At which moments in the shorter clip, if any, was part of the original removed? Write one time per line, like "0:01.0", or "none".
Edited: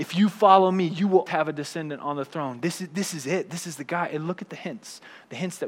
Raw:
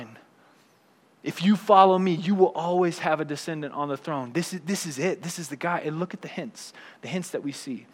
0:01.3